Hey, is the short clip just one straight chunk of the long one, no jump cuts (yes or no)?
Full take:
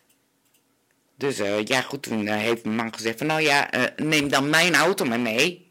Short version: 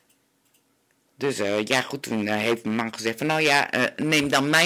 yes